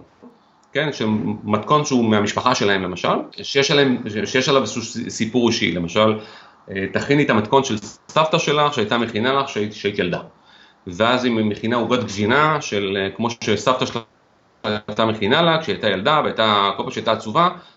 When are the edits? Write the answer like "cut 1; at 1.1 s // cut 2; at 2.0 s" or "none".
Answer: none